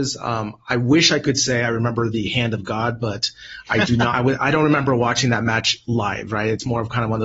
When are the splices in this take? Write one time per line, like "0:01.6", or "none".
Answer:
none